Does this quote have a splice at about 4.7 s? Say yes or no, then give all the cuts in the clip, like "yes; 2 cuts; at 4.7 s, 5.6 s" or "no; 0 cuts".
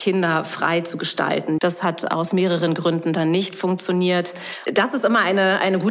yes; 2 cuts; at 1.6 s, 4.7 s